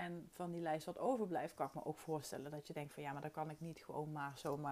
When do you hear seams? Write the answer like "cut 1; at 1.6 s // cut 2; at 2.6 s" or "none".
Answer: none